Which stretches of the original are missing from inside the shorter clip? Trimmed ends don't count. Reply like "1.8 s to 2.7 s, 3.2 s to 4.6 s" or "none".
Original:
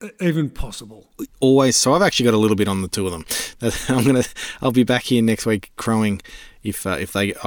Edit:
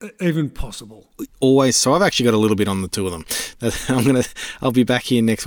none